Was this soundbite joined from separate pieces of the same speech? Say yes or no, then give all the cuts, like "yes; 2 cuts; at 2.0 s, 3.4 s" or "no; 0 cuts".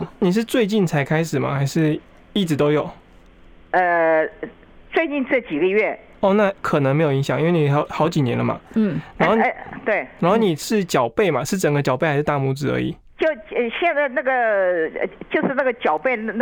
no; 0 cuts